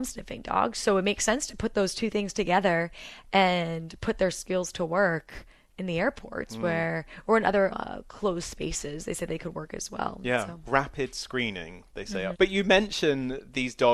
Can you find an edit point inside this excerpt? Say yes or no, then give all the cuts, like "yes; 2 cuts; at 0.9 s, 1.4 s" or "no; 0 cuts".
yes; 2 cuts; at 7.7 s, 12.3 s